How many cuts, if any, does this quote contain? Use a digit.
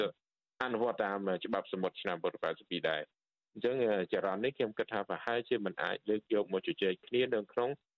1